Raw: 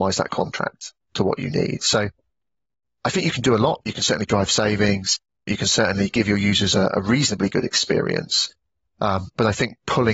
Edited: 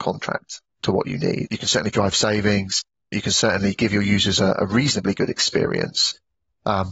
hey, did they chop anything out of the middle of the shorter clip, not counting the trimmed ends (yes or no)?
yes